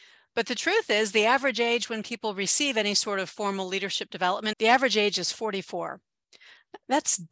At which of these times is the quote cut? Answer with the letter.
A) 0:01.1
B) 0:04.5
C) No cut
B